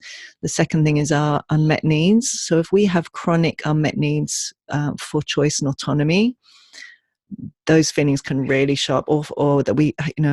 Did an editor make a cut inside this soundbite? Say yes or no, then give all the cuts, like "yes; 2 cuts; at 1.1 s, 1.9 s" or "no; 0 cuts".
no; 0 cuts